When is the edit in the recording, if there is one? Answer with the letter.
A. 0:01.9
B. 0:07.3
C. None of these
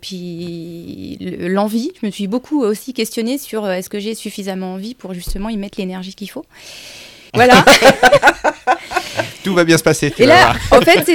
B